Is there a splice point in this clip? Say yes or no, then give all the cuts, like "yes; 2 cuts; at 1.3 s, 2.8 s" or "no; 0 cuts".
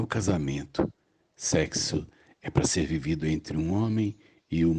no; 0 cuts